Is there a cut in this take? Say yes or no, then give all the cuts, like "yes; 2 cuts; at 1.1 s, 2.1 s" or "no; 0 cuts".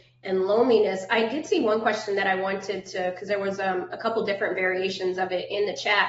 no; 0 cuts